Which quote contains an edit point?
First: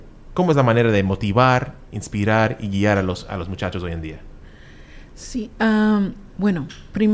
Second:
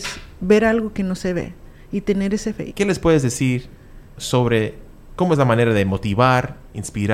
second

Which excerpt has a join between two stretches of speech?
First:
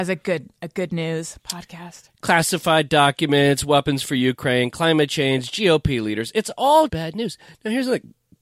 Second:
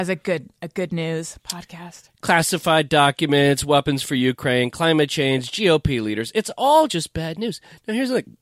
first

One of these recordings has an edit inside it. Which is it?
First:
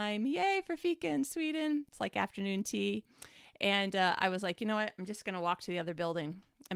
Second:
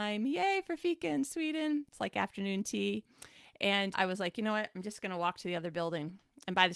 second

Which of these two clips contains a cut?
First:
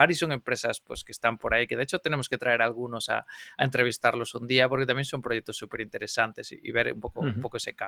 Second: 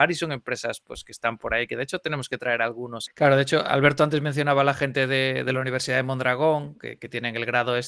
second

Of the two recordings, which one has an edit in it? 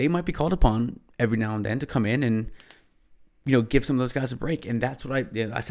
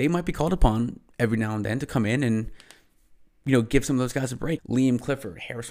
second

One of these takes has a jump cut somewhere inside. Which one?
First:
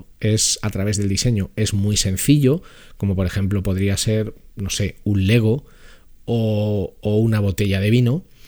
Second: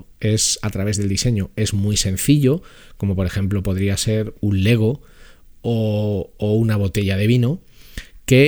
second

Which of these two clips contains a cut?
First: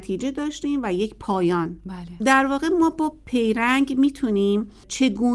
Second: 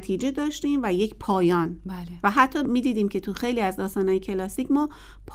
first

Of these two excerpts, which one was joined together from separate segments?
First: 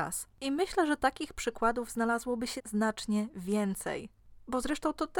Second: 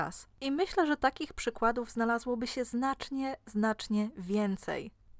first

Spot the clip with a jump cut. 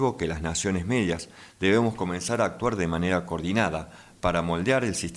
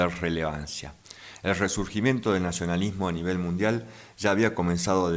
second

